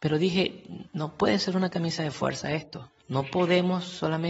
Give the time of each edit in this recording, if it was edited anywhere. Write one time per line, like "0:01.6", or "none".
0:03.0